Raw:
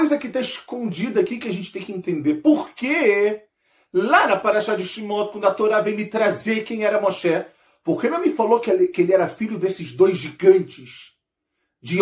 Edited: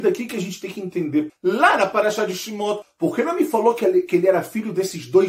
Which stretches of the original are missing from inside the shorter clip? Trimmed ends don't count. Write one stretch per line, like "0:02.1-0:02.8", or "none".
0:02.4-0:03.8
0:05.3-0:07.7